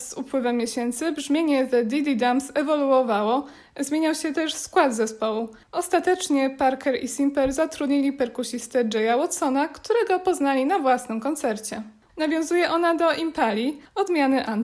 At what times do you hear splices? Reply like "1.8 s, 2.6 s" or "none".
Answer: 12.1 s